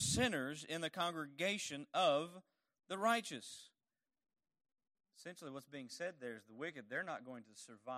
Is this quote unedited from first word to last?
yes; 0 cuts

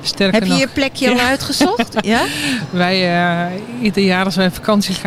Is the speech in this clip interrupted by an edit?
no; 0 cuts

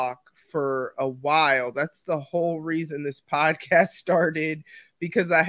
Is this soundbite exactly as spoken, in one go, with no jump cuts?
yes; 0 cuts

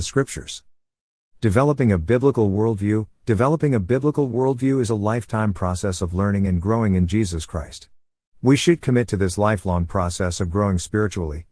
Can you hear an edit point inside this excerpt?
no; 0 cuts

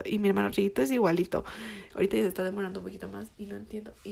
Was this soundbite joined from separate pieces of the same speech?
no; 0 cuts

